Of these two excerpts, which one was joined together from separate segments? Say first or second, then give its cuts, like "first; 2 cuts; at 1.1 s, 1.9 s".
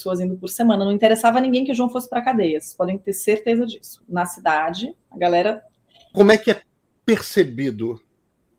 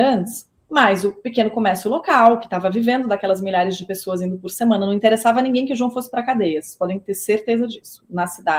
first; 1 cut; at 6.1 s